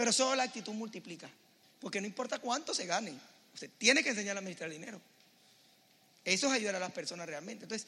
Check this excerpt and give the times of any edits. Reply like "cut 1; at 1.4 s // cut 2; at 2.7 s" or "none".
cut 1; at 1.6 s